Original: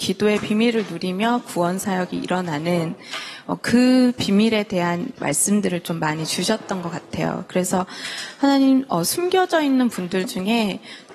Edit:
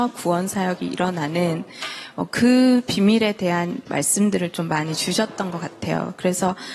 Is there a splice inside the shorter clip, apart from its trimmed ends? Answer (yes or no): no